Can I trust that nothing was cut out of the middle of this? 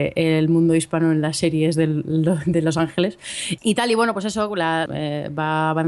no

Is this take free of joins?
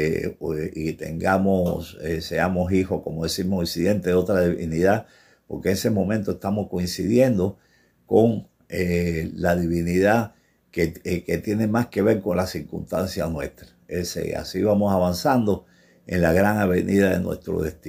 yes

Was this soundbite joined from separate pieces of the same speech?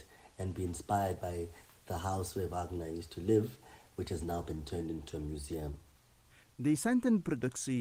no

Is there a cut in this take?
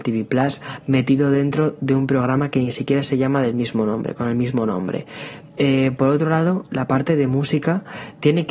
no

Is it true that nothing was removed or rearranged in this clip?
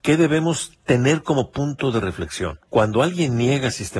no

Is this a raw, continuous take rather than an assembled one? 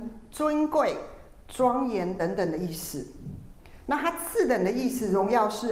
yes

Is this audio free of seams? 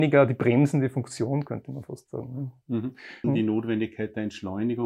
no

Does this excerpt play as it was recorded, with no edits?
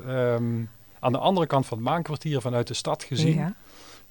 yes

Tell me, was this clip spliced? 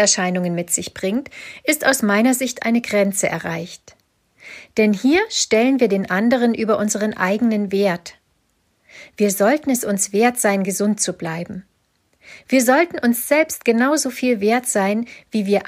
no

